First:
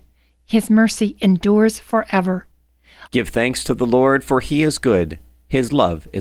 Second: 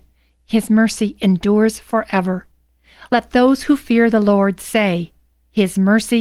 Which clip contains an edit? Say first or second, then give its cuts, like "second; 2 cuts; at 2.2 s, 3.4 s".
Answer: first; 1 cut; at 3.1 s